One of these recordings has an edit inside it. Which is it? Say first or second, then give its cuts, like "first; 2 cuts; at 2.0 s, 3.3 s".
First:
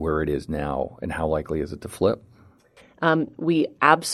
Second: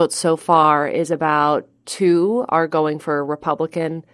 first; 1 cut; at 2.8 s